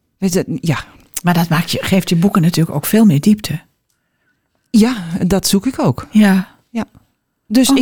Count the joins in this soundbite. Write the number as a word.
zero